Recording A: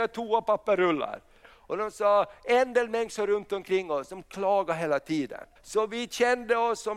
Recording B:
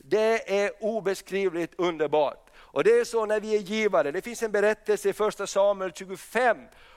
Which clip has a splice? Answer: A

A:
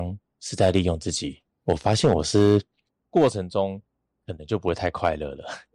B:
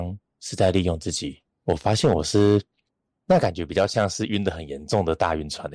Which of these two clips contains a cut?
A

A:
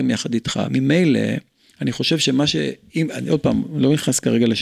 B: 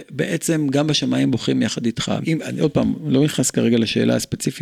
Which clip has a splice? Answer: B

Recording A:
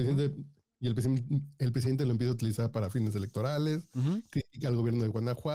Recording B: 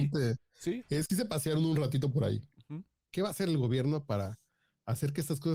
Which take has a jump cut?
B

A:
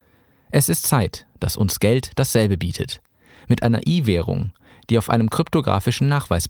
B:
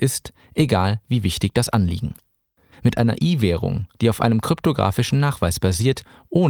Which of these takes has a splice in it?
B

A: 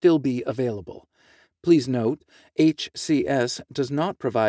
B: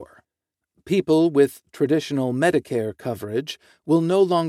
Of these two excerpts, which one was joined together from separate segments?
A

